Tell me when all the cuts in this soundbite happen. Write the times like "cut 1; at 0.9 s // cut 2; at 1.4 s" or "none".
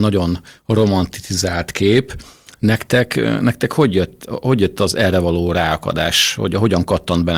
none

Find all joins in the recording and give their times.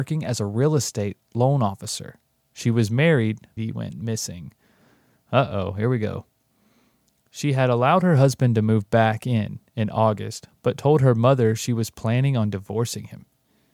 cut 1; at 3.6 s

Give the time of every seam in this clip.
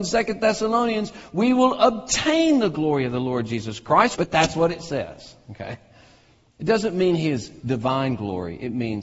cut 1; at 4.1 s

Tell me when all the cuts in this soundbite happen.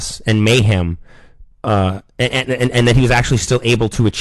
cut 1; at 1.5 s

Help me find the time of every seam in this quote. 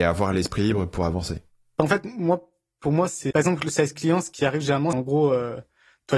cut 1; at 3.3 s // cut 2; at 4.9 s

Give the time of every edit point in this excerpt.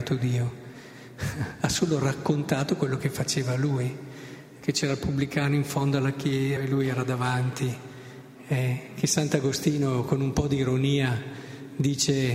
cut 1; at 4.6 s // cut 2; at 6.6 s

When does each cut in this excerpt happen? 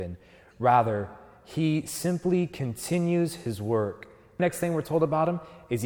cut 1; at 4.4 s

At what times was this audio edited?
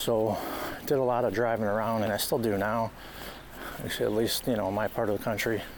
cut 1; at 2.0 s

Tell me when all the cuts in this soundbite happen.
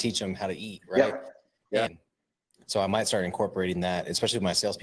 cut 1; at 1.9 s

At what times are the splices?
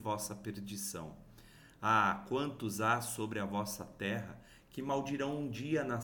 none

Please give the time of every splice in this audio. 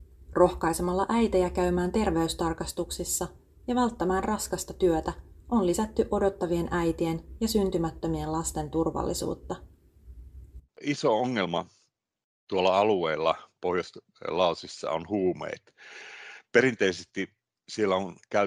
cut 1; at 10.6 s

